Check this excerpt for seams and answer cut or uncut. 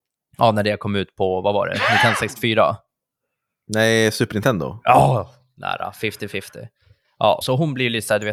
cut